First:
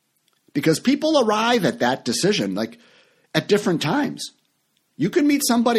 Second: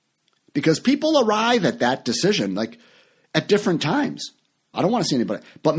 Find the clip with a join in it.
second; 1 cut; at 4.7 s

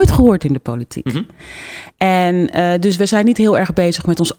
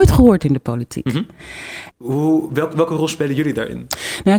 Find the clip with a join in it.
second; 1 cut; at 1.9 s

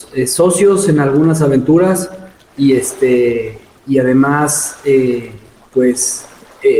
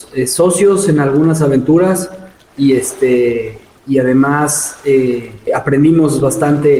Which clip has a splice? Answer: second; 1 cut; at 5.5 s

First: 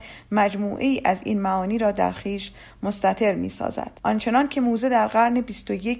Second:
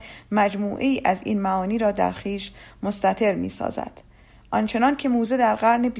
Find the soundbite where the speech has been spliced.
first; 1 cut; at 4.0 s

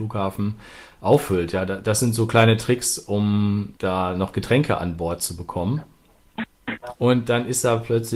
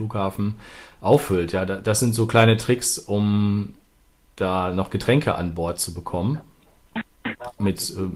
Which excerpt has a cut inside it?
first; 2 cuts; at 3.8 s, 7.0 s

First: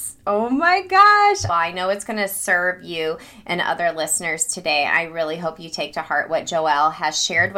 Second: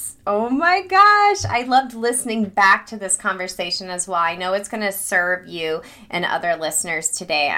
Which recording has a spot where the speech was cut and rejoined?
first; 1 cut; at 1.5 s

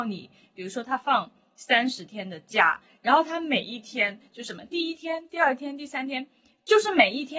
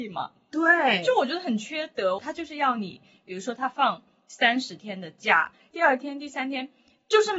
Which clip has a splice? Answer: second; 2 cuts; at 2.2 s, 5.7 s

